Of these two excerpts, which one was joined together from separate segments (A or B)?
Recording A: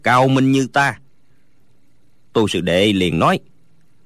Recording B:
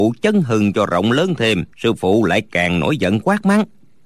B